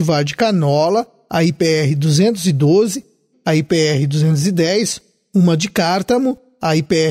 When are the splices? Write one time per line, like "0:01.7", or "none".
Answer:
0:03.3